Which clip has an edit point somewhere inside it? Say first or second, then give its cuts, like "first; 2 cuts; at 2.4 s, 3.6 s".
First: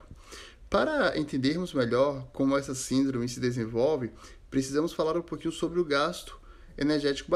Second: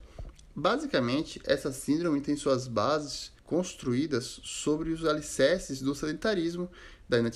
second; 1 cut; at 3.4 s